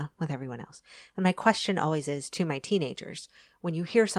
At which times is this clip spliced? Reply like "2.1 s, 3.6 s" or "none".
none

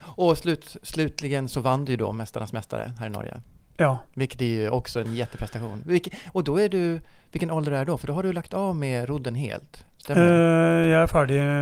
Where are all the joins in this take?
none

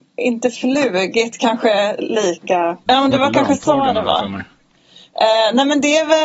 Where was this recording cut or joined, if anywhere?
2.9 s

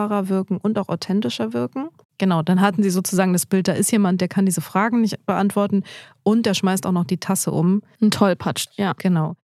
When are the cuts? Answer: 2.0 s

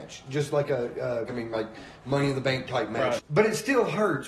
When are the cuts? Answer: 1.3 s, 3.2 s

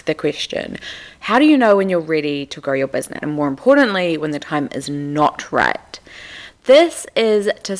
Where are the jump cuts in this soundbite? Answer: 3.2 s

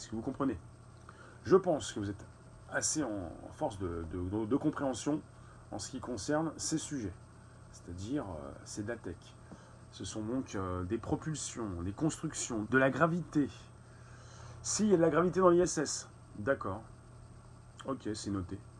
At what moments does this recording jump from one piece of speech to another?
12.7 s

